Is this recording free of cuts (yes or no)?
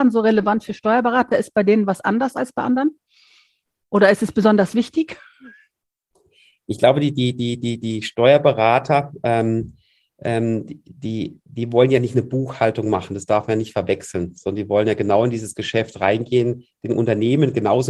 yes